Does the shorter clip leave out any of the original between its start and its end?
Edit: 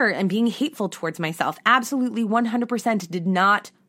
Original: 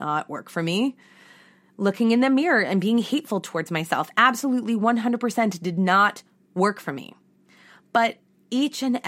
no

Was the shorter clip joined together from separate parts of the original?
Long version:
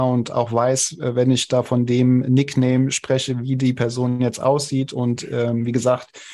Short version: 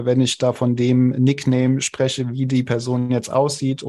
no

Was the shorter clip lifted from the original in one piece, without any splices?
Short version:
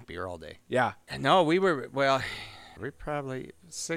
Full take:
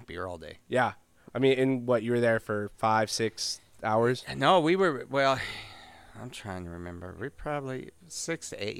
no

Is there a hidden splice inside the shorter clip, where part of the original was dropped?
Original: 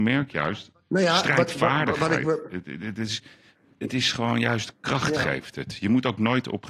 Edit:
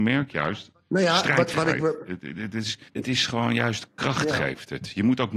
yes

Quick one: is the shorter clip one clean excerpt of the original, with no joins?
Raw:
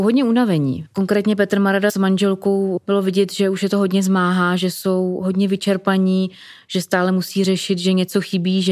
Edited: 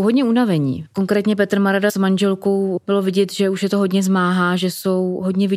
yes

